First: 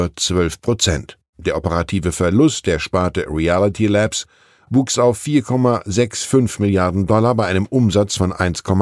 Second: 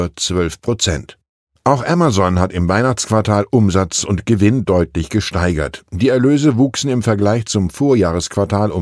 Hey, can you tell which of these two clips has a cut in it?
first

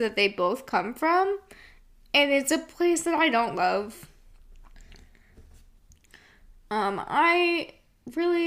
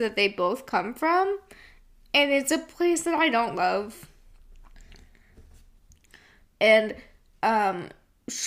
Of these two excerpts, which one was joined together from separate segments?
second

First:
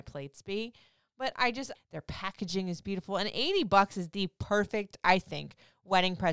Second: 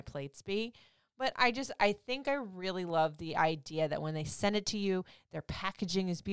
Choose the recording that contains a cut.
first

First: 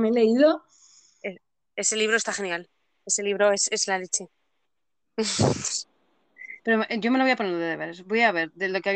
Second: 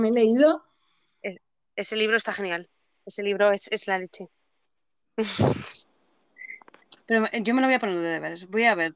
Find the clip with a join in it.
first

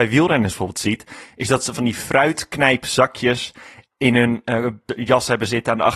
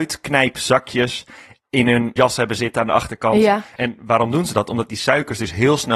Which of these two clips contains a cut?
second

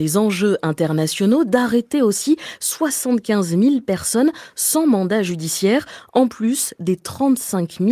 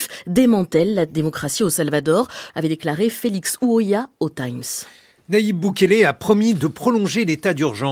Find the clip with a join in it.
second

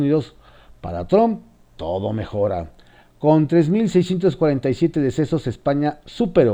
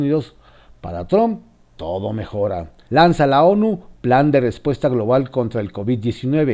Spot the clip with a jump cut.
second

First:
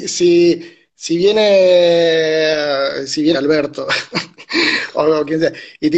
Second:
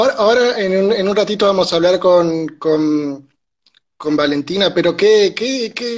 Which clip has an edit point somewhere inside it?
first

